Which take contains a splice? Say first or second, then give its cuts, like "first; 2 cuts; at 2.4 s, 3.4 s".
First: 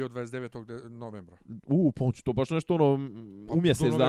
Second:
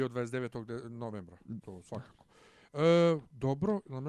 second; 1 cut; at 1.6 s